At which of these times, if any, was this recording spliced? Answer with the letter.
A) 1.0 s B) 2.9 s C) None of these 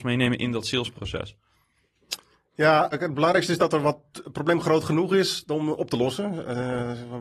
B